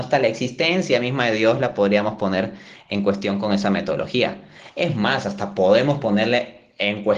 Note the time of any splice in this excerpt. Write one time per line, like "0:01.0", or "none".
none